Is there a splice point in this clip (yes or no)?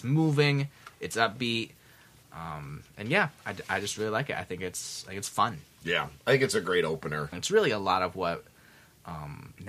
yes